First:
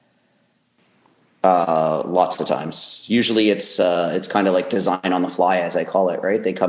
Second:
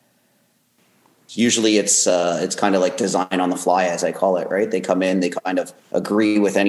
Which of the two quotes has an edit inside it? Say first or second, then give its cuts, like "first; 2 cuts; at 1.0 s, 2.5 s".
second; 1 cut; at 1.3 s